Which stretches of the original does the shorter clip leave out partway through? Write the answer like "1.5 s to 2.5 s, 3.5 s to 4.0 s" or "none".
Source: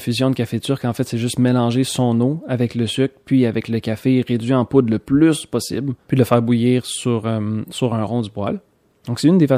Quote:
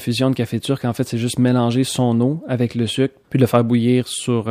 3.2 s to 6.0 s